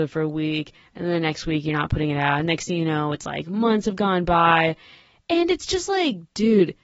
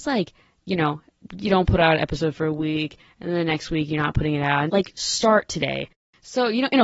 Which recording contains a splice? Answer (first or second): second